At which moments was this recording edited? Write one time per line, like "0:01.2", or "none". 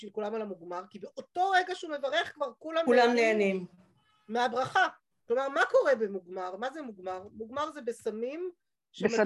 0:05.1